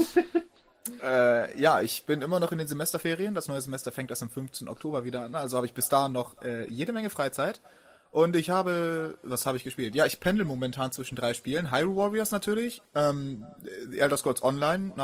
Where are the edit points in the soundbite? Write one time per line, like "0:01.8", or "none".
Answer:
none